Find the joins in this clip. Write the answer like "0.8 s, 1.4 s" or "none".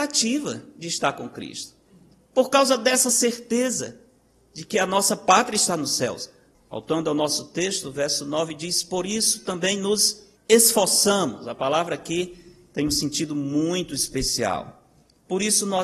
6.5 s, 10.4 s